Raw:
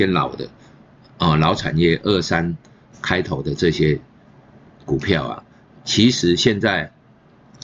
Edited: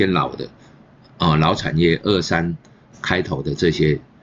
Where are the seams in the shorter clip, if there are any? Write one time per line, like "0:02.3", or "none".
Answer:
none